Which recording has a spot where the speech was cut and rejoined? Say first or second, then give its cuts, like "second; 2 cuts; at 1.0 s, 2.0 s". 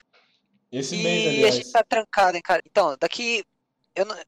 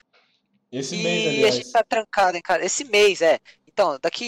first; 1 cut; at 2.6 s